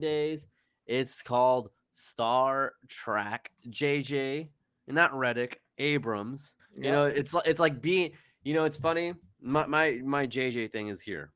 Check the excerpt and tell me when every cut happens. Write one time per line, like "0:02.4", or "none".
0:03.6
0:06.6